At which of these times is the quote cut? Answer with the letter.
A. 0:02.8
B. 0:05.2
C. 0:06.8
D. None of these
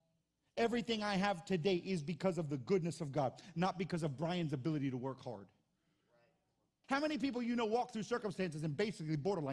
C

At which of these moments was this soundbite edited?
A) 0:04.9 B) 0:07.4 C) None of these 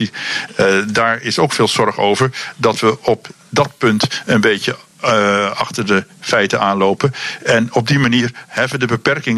C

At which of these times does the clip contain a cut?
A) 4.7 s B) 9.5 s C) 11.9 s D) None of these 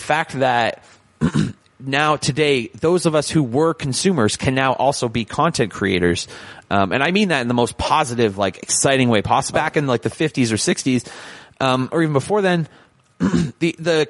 B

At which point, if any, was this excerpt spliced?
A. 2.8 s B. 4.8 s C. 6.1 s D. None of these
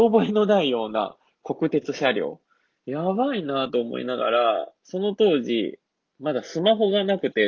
A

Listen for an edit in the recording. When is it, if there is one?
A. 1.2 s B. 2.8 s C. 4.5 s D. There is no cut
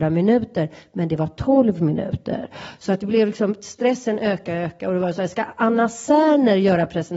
C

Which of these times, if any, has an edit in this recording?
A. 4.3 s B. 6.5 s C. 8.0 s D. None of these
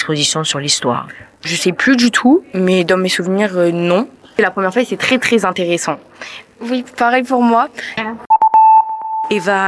C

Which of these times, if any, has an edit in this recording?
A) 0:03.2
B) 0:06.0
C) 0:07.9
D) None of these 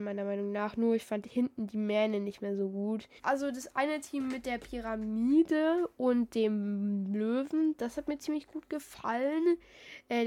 A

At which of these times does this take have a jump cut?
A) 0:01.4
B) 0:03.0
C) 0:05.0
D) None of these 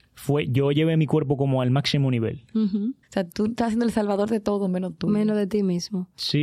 B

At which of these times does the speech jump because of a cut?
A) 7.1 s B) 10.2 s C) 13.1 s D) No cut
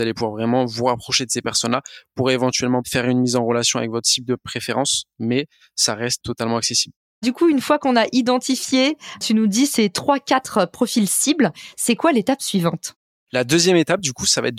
D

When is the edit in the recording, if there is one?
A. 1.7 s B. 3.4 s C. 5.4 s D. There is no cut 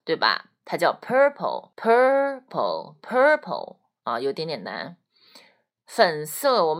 A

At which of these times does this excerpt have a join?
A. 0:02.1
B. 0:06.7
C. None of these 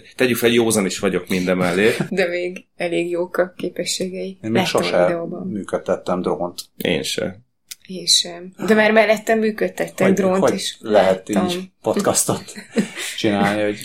A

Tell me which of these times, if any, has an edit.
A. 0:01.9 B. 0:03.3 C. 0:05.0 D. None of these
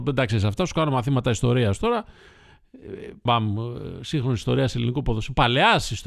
B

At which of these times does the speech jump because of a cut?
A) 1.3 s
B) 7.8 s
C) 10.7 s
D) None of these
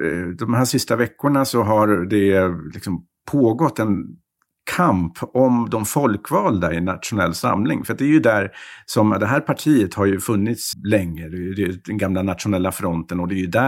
C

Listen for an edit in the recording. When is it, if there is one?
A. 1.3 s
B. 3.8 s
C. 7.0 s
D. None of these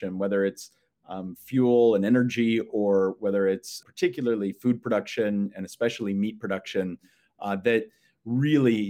B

